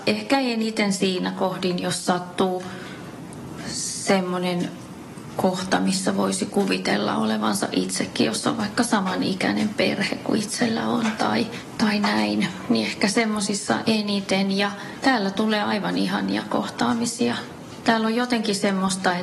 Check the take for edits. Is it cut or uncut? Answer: uncut